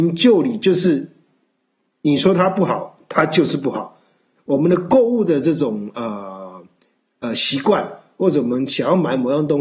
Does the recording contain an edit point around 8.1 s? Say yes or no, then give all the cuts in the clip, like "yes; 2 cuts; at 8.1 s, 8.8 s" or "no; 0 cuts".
no; 1 cut; at 4.4 s